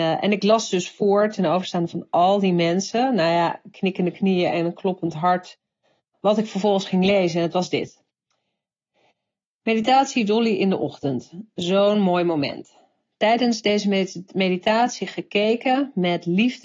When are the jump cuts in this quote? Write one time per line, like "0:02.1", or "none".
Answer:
0:06.1